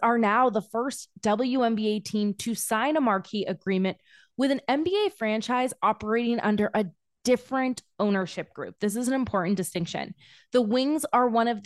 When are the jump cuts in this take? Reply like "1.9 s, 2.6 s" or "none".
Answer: none